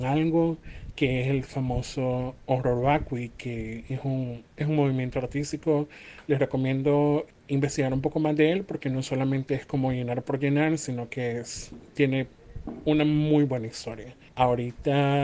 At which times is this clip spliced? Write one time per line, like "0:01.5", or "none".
0:14.3